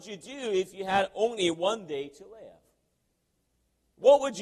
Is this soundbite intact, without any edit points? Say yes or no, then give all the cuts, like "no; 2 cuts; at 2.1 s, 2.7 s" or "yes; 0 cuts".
yes; 0 cuts